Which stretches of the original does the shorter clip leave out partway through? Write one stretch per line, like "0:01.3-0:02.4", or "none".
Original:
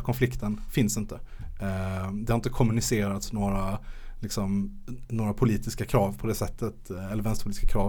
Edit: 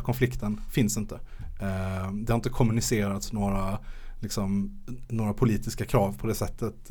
none